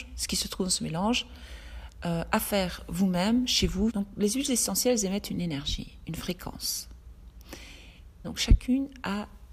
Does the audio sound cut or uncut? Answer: cut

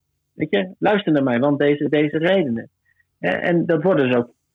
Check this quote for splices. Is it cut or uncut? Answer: uncut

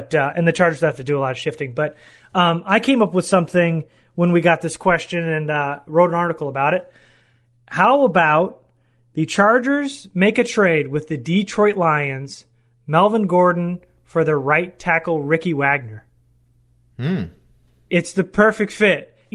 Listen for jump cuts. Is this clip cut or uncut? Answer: uncut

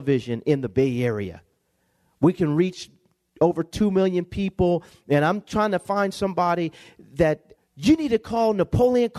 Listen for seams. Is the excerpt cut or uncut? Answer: cut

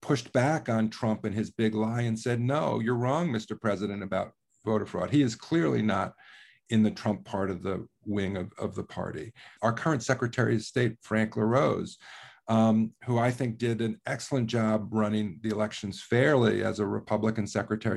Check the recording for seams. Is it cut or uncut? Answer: cut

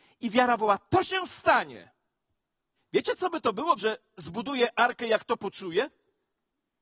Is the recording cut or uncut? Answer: cut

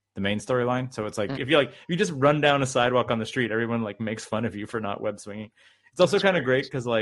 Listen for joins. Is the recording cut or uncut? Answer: cut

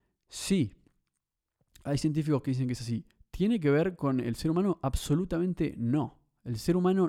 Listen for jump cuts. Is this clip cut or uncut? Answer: uncut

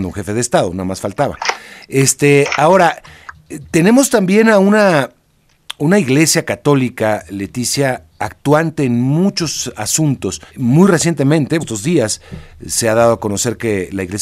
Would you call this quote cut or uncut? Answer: cut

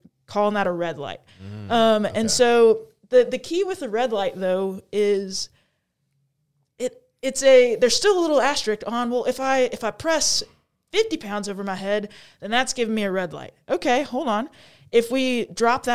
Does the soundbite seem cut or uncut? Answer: uncut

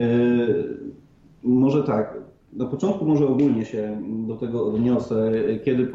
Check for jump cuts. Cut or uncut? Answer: uncut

